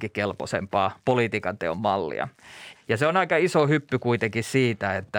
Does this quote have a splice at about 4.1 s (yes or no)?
no